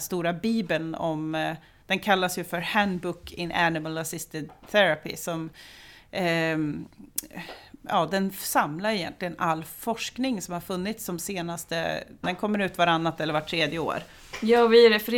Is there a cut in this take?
yes; 1 cut; at 12.2 s

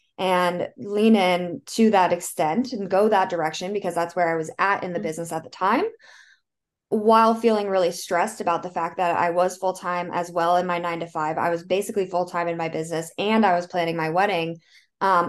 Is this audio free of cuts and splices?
yes; 0 cuts

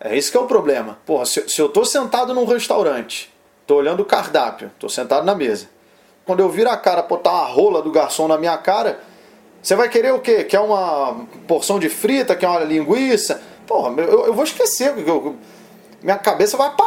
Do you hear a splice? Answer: yes; 2 cuts; at 1.0 s, 6.3 s

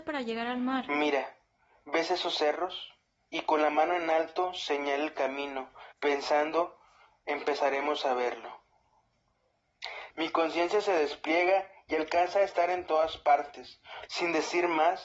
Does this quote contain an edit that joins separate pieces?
yes; 3 cuts; at 5.9 s, 10.1 s, 14.1 s

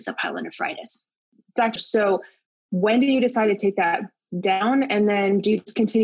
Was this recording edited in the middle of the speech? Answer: yes; 1 cut; at 1.8 s

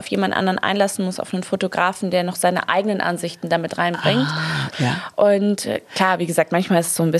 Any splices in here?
yes; 1 cut; at 4.7 s

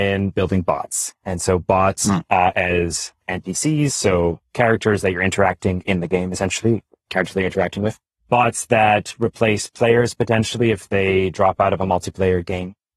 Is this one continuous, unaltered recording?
yes; 0 cuts

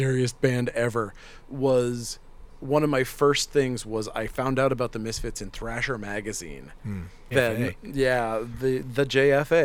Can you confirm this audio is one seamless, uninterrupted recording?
no; 1 cut; at 7.3 s

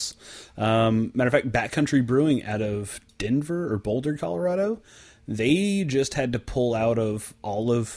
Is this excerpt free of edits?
yes; 0 cuts

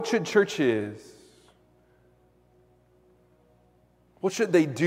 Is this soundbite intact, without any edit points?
yes; 0 cuts

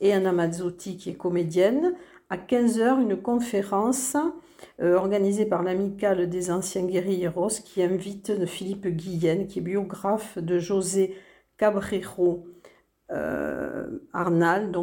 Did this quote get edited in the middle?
no; 0 cuts

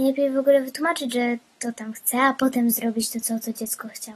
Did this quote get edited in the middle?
no; 0 cuts

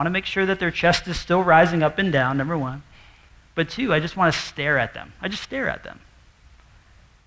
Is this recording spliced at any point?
no; 0 cuts

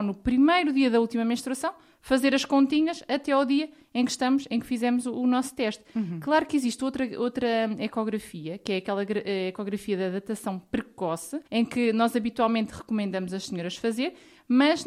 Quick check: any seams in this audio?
yes; 1 cut; at 11.5 s

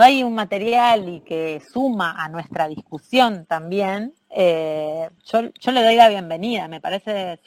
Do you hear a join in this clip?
yes; 1 cut; at 5.2 s

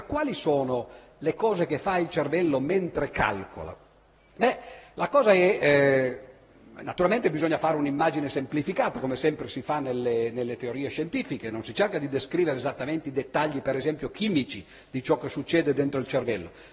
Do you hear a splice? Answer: no; 0 cuts

